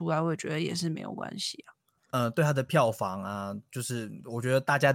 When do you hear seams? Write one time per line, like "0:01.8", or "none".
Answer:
0:02.1